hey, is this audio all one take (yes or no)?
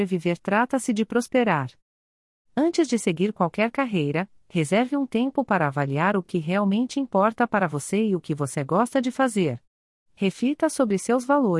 yes